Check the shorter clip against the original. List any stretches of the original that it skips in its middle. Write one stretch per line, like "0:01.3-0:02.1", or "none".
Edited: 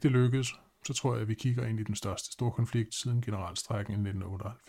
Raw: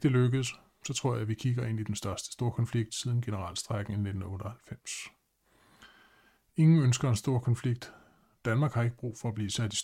none